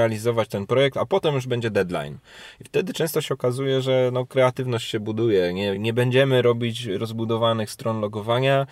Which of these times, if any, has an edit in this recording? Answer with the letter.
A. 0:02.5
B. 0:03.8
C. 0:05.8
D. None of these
D